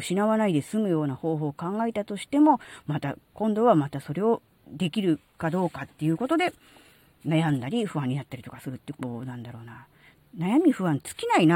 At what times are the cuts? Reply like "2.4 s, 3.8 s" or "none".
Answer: none